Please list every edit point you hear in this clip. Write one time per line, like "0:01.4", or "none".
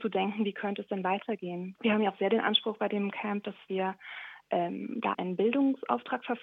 0:01.8
0:05.1